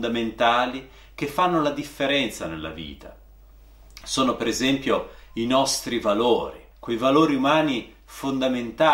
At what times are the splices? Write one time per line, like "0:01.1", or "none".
0:04.0
0:06.7

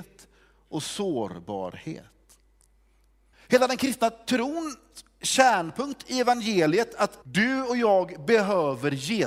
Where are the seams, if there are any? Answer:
0:03.3
0:07.2

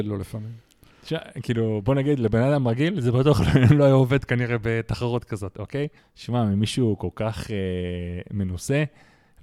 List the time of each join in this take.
0:06.0

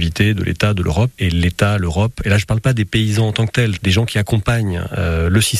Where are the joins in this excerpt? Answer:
0:01.1
0:03.8

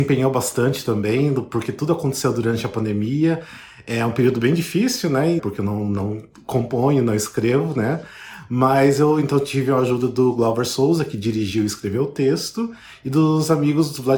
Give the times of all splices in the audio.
0:05.4

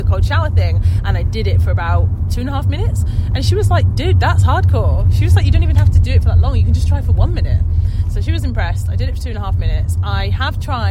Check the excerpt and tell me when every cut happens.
none

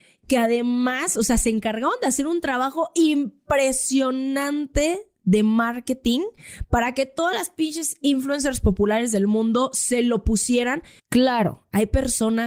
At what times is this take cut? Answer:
0:11.0

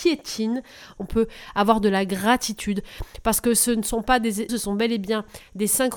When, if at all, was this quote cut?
0:01.0
0:04.5

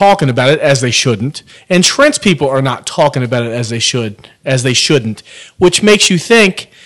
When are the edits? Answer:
none

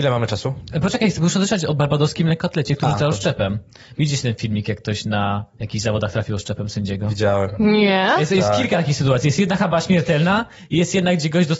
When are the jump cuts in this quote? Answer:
none

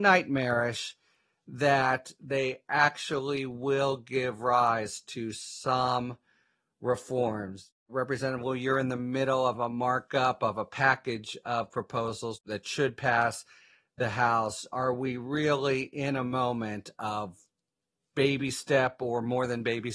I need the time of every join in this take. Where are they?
none

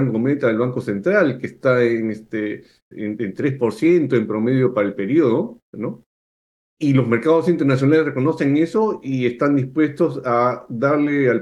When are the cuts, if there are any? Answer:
0:02.9

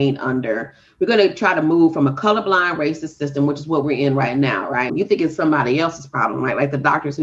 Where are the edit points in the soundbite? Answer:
0:04.9

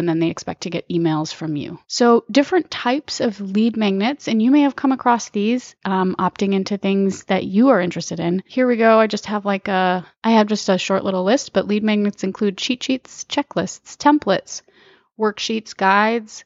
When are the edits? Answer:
none

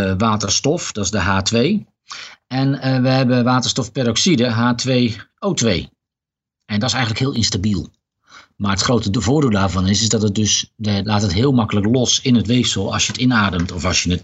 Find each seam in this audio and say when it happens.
0:11.0

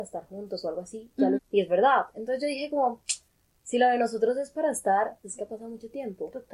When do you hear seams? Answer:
0:01.4
0:05.2

